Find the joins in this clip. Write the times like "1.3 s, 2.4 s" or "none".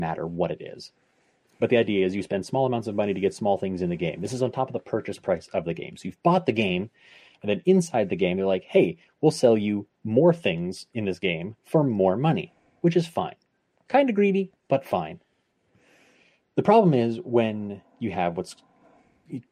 none